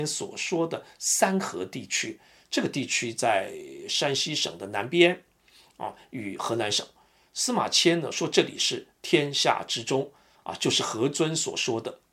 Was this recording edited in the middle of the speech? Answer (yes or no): no